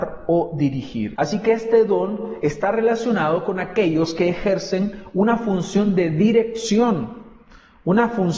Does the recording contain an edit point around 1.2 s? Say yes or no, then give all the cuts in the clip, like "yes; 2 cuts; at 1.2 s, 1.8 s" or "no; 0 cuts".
yes; 1 cut; at 1.2 s